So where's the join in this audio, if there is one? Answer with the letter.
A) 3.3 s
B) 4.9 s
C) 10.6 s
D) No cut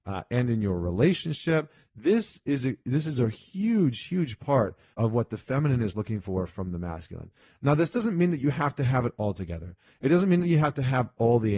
B